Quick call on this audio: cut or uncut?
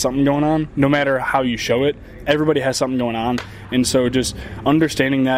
uncut